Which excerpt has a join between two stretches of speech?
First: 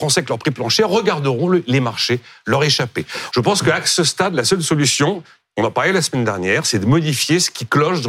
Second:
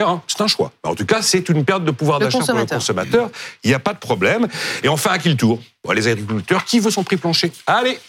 first; 1 cut; at 3.3 s

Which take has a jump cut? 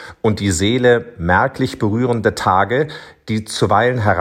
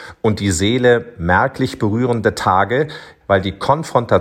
second; 1 cut; at 3.2 s

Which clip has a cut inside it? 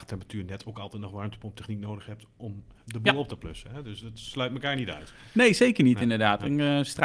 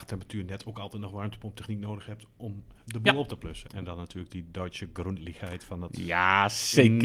second; 1 cut; at 3.7 s

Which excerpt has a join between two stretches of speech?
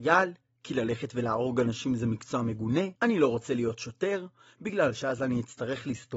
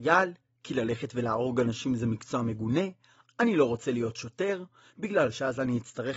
first; 1 cut; at 3.0 s

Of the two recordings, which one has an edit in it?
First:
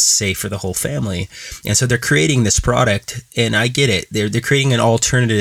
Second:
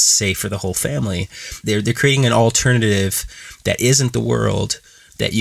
second; 1 cut; at 1.6 s

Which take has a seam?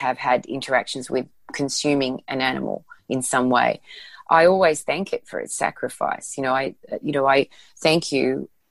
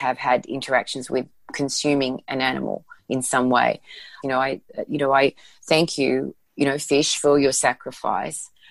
second; 1 cut; at 4.2 s

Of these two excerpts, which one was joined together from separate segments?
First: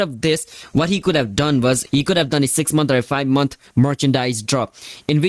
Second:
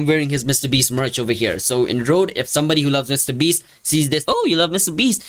second; 1 cut; at 4.2 s

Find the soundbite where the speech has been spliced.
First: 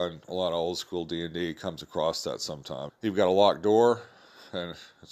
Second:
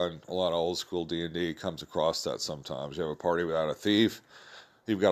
first; 1 cut; at 2.9 s

